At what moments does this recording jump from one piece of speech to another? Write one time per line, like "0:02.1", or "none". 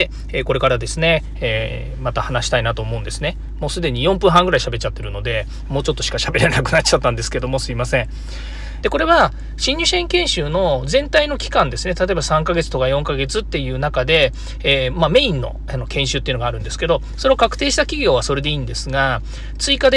0:08.8
0:14.9